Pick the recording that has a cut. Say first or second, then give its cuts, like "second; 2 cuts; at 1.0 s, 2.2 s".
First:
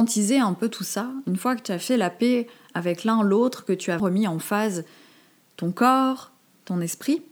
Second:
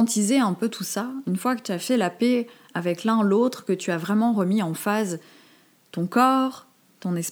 first; 1 cut; at 4.0 s